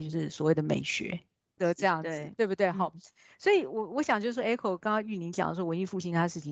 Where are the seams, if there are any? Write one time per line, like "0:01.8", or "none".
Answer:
0:01.6